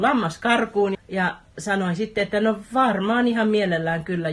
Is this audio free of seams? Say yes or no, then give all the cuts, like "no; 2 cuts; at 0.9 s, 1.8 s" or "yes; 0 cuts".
no; 1 cut; at 0.9 s